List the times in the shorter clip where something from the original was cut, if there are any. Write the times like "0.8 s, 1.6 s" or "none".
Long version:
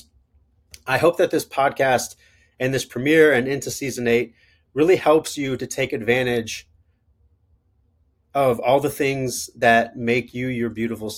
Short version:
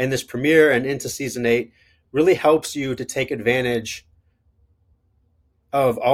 none